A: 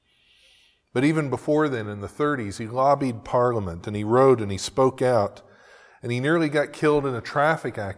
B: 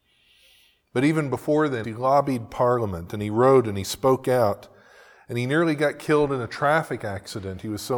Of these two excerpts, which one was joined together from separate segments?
B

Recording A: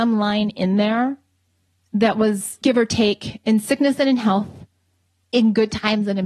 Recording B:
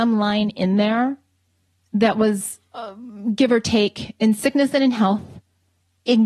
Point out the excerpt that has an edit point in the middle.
A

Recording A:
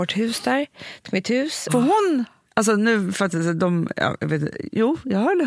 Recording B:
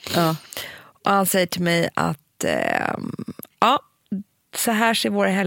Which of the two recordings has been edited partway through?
A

